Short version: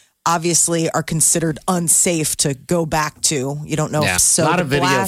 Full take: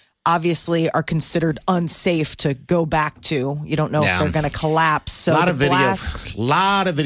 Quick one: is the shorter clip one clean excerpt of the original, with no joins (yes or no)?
no